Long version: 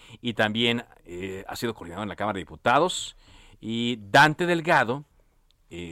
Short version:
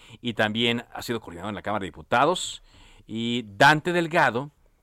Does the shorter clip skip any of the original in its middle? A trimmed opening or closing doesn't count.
yes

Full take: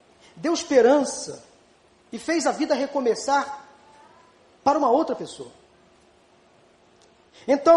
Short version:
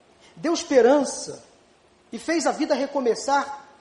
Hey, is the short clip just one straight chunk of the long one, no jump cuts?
yes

